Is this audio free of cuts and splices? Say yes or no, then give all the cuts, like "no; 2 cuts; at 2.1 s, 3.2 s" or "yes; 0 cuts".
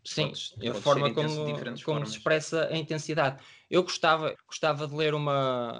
no; 1 cut; at 4.3 s